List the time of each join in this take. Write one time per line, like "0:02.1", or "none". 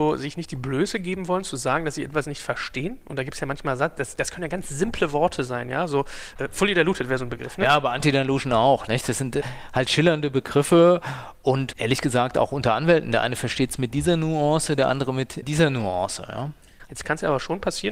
0:16.9